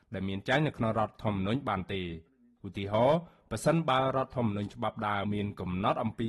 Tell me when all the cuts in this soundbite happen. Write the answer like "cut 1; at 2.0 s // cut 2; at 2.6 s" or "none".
cut 1; at 5.2 s